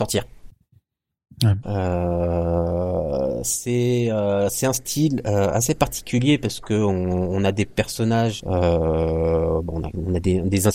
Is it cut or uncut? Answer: cut